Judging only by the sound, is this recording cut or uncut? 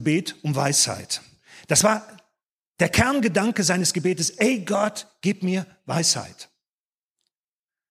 uncut